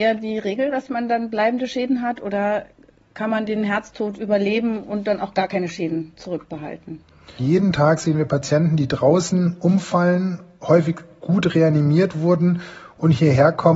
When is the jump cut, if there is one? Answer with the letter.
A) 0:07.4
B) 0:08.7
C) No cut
A